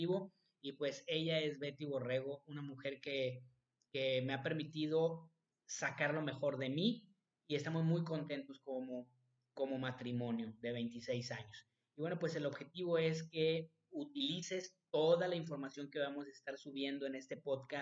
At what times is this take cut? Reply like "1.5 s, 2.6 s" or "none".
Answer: none